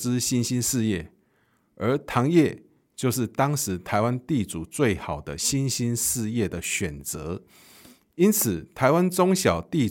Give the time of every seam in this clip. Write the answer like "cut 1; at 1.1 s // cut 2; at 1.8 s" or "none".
none